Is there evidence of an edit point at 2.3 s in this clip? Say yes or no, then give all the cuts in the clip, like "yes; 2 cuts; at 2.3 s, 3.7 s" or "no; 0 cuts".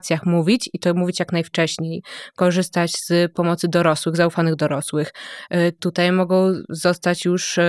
no; 1 cut; at 5.8 s